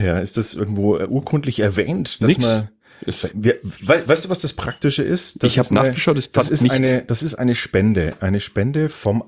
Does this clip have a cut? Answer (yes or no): no